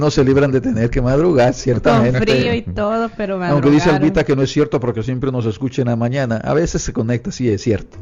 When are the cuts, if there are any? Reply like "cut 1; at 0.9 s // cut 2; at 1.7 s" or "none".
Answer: none